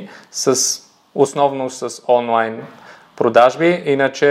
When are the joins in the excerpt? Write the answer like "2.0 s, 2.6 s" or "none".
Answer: none